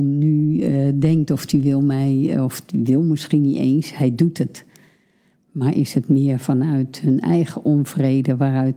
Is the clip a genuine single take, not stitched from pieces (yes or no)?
no